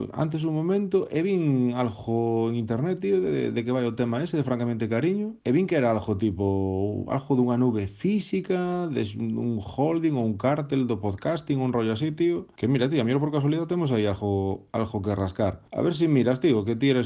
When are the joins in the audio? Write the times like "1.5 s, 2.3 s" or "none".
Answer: none